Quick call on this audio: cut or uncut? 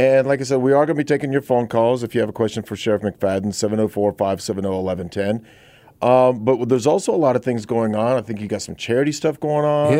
uncut